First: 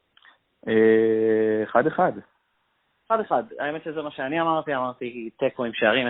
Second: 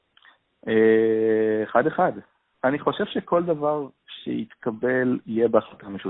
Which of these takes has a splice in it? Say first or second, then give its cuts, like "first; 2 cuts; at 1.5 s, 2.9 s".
second; 1 cut; at 2.5 s